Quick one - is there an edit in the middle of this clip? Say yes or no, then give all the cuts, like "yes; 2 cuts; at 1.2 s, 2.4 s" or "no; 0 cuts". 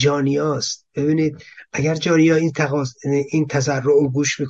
no; 0 cuts